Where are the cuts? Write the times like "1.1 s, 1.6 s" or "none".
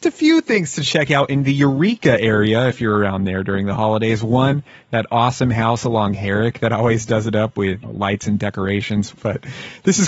7.8 s, 9.2 s